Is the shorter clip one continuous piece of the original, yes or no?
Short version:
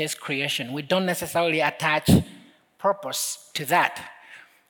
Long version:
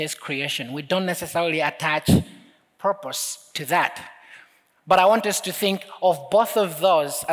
yes